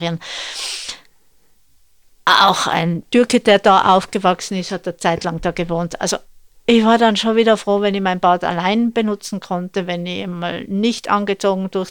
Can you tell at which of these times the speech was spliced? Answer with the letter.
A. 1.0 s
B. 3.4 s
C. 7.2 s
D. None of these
D